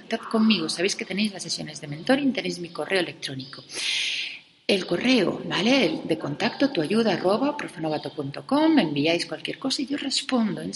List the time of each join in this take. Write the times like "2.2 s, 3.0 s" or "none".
none